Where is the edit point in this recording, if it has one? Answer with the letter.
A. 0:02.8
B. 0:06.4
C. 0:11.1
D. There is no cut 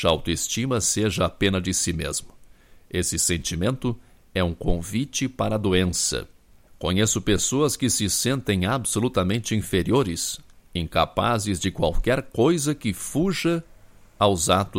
D